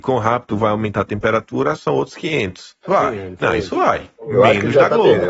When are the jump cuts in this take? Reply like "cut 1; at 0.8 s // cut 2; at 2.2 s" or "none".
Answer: cut 1; at 2.8 s

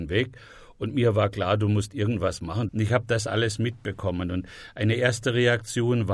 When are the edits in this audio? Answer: cut 1; at 2.7 s

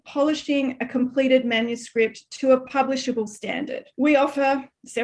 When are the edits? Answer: cut 1; at 3.9 s

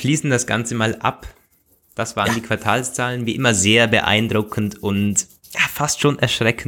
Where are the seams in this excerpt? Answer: none

